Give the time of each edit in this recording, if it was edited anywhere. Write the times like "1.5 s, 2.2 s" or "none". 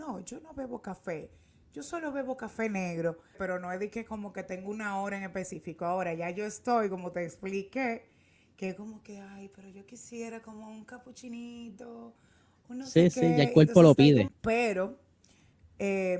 3.3 s, 14.3 s